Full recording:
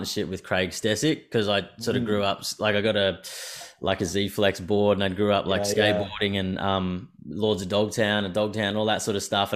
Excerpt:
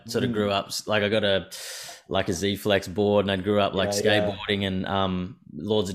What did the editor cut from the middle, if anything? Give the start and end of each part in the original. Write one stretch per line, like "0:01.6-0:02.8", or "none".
none